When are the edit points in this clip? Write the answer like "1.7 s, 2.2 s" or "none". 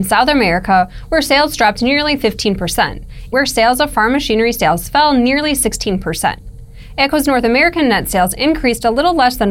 3.3 s